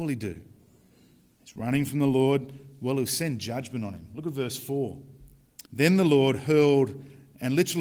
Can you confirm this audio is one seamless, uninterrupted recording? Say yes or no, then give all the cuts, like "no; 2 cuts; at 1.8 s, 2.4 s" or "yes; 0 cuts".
no; 1 cut; at 5.6 s